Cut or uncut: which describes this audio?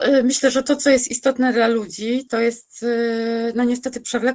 uncut